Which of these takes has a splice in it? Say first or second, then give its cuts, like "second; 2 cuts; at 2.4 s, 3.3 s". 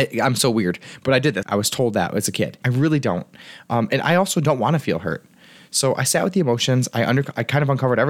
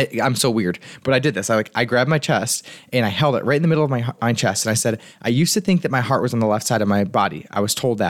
first; 2 cuts; at 1.4 s, 2.6 s